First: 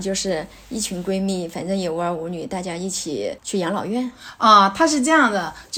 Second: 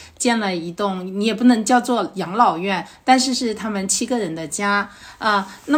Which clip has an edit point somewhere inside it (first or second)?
first